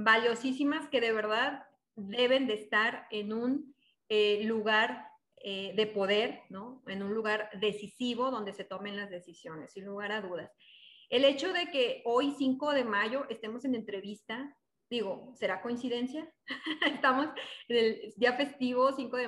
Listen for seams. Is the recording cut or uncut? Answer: uncut